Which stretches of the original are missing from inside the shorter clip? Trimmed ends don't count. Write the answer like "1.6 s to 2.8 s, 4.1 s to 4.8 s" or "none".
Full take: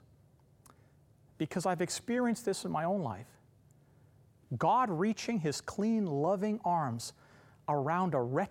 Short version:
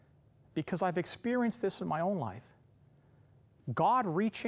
none